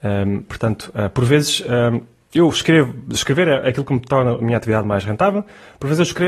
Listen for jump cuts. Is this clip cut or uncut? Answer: uncut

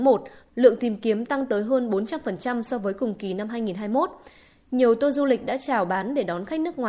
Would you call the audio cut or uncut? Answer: uncut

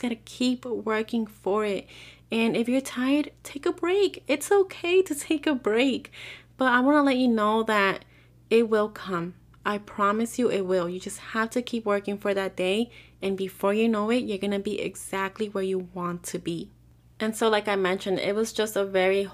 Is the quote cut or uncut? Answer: uncut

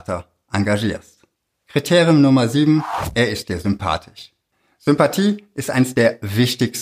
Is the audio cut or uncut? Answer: uncut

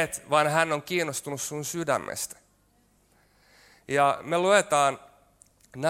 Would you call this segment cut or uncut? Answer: uncut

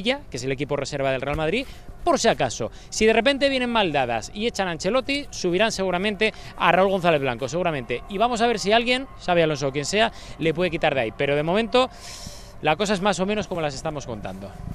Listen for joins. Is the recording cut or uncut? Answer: uncut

